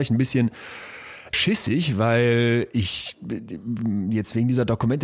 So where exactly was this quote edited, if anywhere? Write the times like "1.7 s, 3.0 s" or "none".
1.3 s